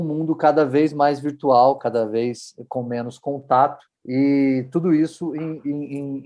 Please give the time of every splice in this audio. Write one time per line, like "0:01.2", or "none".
0:01.8
0:04.0

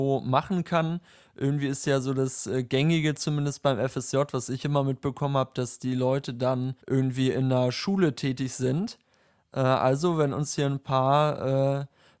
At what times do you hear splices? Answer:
0:06.8

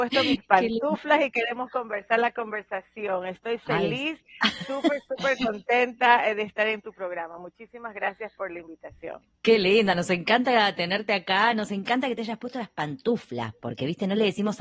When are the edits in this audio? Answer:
none

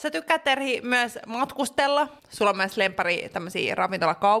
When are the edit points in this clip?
0:02.2

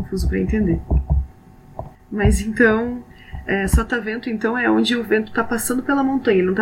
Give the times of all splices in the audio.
0:01.9

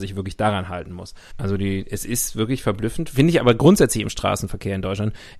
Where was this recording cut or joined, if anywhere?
0:01.3

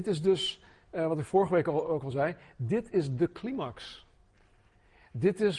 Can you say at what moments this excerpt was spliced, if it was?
none

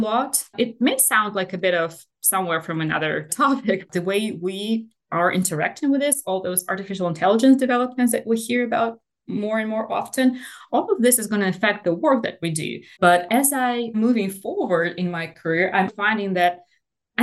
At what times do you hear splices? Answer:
0:03.9
0:13.0
0:15.9

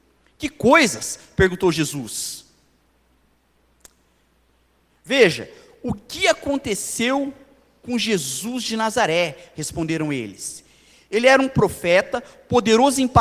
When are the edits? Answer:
none

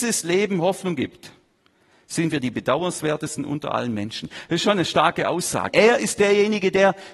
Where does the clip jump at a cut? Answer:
0:05.7

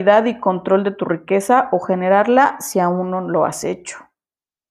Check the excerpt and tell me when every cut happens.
none

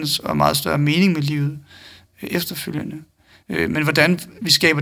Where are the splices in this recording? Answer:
none

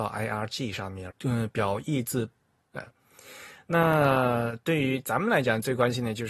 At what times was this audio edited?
0:01.1
0:02.6

